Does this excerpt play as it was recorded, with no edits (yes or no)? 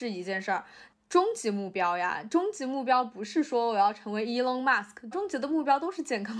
no